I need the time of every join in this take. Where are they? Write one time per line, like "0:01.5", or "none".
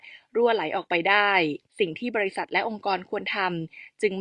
0:01.7